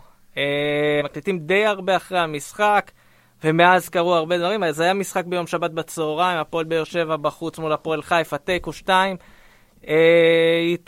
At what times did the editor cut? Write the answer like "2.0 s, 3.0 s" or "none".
1.0 s